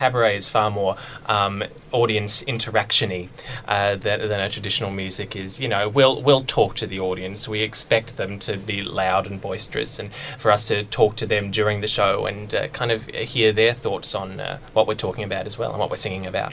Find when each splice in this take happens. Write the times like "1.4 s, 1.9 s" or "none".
none